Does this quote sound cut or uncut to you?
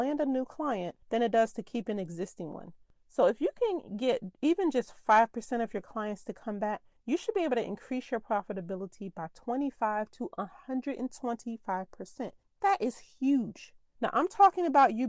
cut